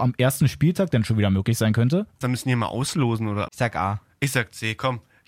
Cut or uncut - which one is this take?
cut